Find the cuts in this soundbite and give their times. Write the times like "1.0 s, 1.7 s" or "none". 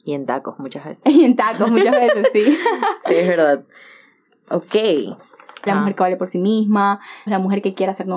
5.7 s, 7.3 s